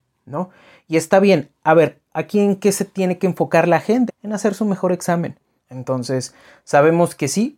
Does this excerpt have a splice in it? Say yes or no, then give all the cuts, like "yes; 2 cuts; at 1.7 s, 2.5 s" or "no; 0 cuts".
yes; 2 cuts; at 4.1 s, 5.6 s